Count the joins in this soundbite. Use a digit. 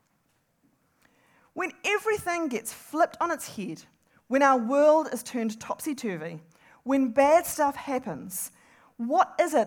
0